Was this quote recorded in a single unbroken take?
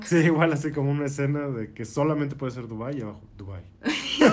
yes; 0 cuts

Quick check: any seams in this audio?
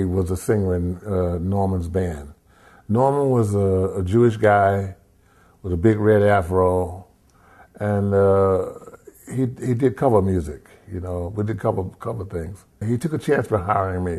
yes; 1 cut; at 12.8 s

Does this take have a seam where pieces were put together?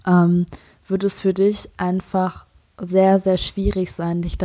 no; 0 cuts

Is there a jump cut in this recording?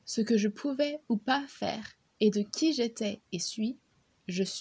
no; 0 cuts

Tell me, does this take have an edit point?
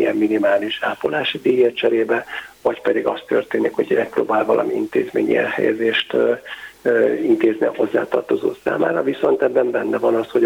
no; 0 cuts

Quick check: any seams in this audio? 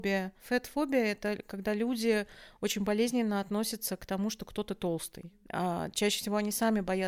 no; 0 cuts

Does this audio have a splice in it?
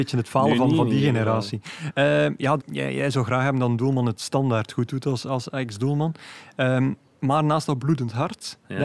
yes; 1 cut; at 2.6 s

